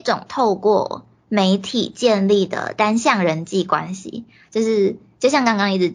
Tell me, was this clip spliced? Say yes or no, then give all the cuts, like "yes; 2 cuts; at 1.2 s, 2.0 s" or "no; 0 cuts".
no; 0 cuts